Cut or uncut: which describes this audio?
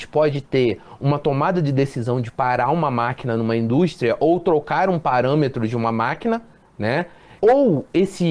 cut